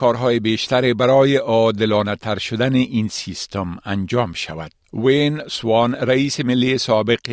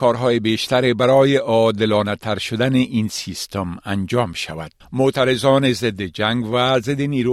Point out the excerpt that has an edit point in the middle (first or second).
second